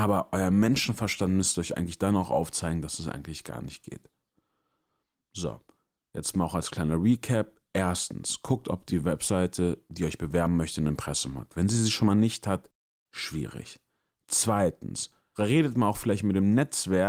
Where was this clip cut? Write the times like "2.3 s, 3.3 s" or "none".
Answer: none